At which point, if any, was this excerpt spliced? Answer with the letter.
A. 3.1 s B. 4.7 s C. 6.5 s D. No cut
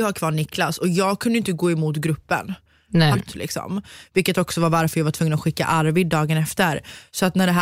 A